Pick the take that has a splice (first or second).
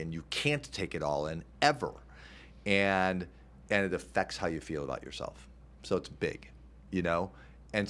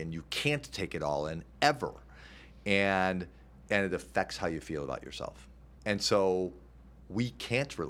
second